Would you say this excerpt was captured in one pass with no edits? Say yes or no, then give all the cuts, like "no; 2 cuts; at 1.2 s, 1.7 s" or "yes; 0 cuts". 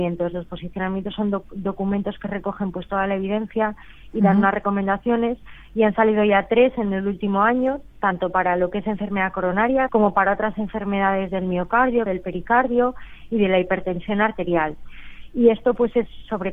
no; 2 cuts; at 9.9 s, 12.1 s